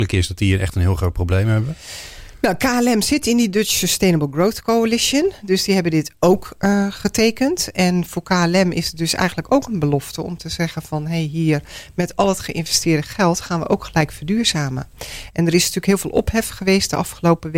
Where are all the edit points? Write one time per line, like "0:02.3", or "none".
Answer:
none